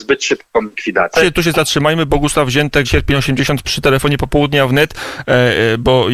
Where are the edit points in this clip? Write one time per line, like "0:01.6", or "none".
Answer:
0:01.1
0:02.8

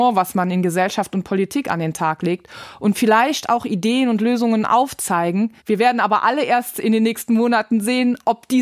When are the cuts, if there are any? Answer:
0:05.6

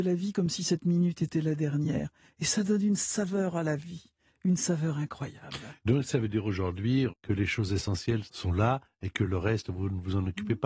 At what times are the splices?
0:07.1
0:08.2

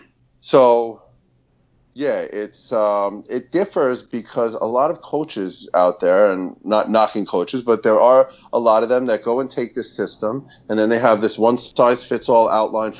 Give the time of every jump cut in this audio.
none

